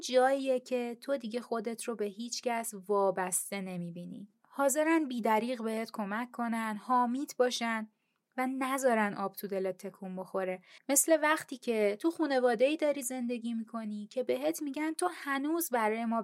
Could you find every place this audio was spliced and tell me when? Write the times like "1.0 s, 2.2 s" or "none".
4.3 s, 10.8 s